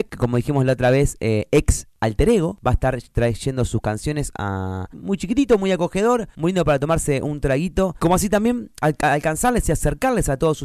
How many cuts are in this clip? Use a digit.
2